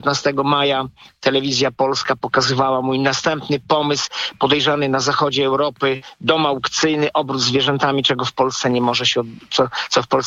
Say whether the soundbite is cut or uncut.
uncut